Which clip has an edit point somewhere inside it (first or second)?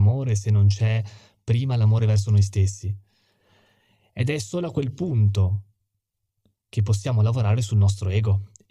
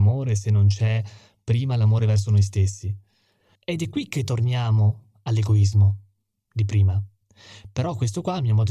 second